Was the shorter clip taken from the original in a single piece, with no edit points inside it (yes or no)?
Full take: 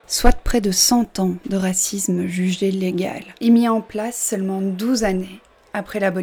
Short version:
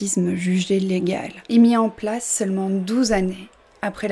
yes